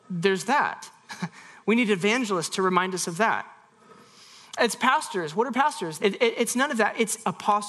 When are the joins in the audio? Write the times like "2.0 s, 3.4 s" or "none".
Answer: 6.0 s